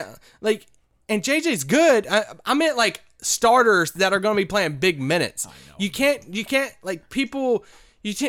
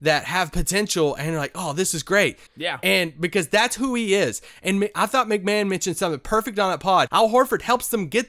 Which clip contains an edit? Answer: second; 2 cuts; at 2.5 s, 7.1 s

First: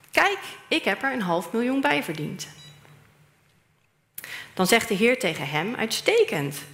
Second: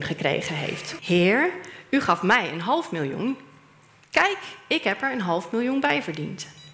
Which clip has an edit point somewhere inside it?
second; 1 cut; at 1.0 s

